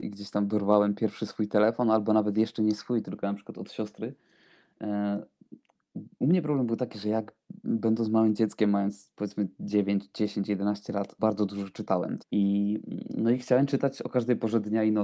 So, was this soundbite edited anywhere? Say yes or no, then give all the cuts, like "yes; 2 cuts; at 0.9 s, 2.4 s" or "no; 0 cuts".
yes; 2 cuts; at 11.2 s, 12.2 s